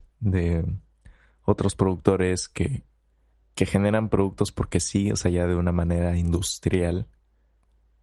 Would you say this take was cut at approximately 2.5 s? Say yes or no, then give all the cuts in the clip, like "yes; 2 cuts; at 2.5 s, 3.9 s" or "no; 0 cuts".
no; 0 cuts